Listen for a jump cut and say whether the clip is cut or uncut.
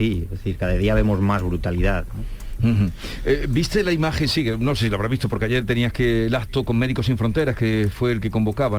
uncut